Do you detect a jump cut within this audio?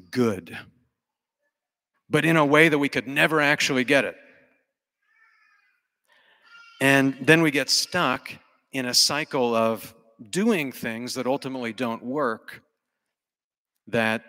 yes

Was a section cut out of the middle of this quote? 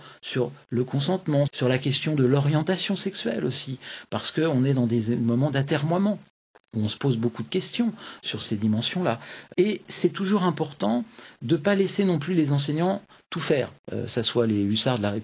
yes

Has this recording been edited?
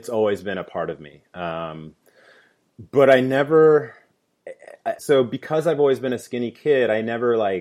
yes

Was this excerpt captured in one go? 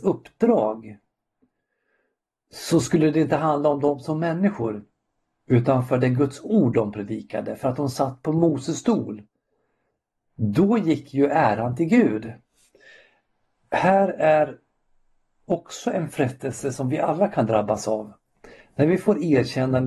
yes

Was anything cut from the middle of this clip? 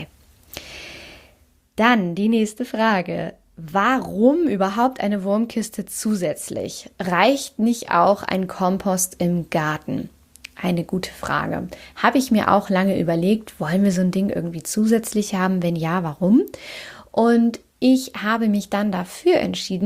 no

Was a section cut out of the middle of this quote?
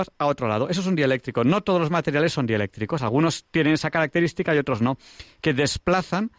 no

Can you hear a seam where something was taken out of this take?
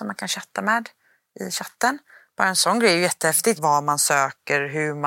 yes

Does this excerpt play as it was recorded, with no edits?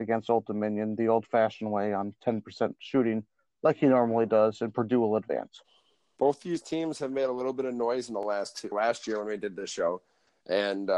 no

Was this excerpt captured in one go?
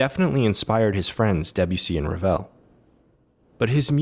yes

